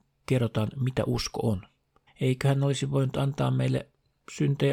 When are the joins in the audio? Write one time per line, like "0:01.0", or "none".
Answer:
0:02.1